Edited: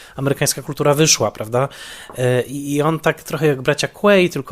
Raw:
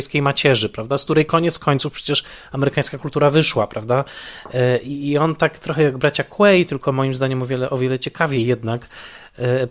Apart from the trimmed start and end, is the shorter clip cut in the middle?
no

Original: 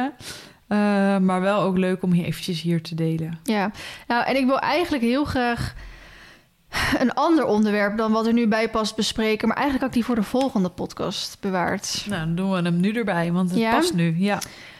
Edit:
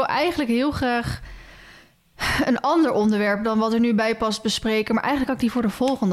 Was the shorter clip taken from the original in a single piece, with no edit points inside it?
yes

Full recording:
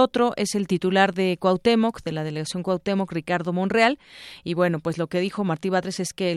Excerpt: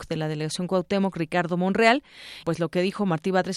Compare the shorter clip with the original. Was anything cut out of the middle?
yes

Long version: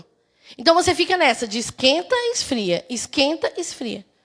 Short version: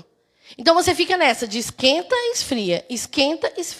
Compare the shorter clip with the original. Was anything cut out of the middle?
no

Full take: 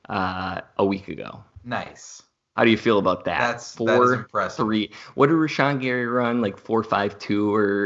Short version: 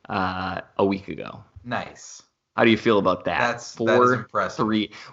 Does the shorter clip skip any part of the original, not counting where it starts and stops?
no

